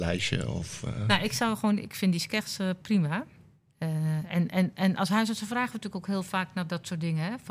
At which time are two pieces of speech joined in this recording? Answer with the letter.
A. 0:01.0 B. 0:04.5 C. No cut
C